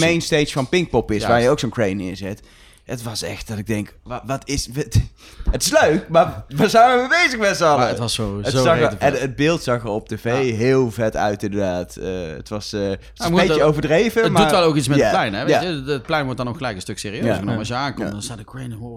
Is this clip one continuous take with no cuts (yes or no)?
yes